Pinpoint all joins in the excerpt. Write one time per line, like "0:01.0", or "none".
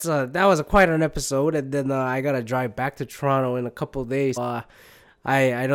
0:04.4